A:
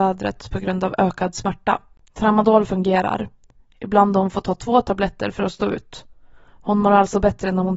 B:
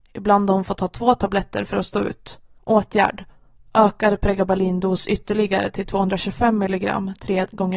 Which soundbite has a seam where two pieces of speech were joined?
B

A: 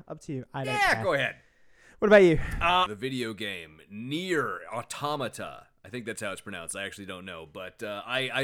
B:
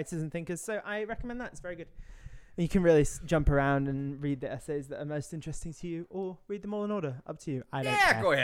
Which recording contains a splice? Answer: A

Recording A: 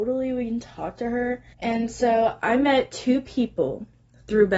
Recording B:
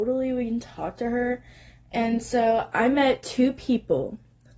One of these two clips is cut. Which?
A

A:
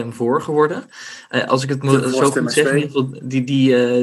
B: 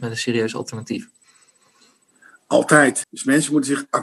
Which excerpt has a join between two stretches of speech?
B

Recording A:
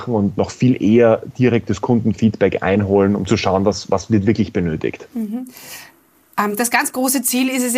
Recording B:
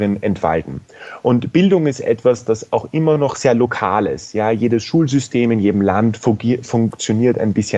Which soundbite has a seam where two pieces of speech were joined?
A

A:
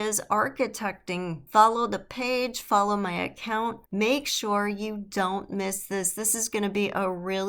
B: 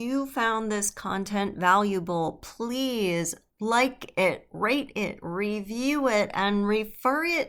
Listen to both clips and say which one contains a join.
A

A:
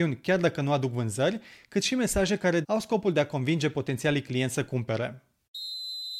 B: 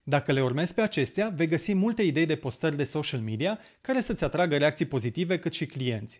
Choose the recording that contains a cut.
A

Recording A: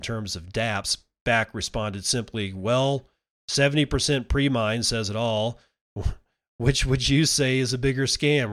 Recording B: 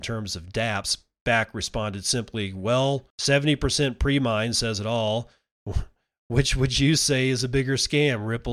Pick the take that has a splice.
B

